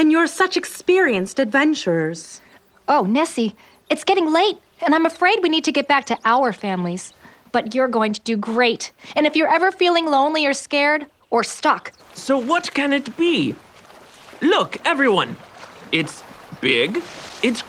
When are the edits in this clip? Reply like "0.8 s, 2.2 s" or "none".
12.0 s